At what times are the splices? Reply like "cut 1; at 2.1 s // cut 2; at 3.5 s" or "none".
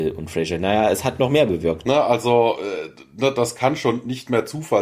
cut 1; at 1.8 s